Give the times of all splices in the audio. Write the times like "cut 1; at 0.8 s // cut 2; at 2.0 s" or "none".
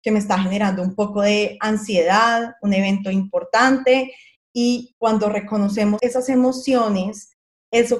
cut 1; at 6.0 s